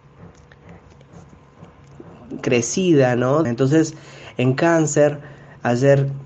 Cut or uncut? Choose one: cut